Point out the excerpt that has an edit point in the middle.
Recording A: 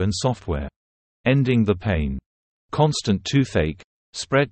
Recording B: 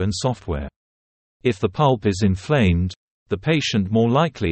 A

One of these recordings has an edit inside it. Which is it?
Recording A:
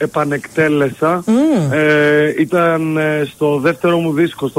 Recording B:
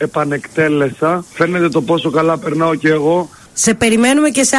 B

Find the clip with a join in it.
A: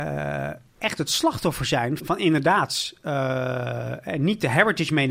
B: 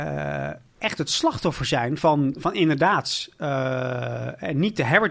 A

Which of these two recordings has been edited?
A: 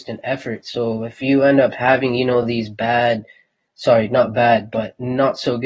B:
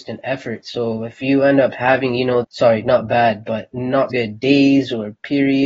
B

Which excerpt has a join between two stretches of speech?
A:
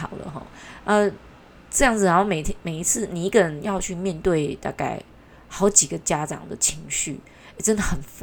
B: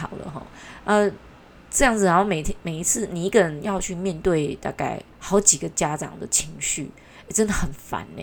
B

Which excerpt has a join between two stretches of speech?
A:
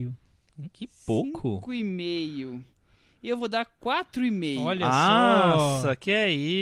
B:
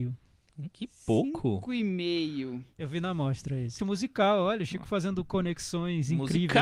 B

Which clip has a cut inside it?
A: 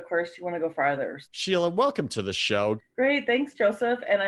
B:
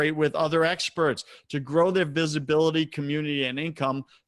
A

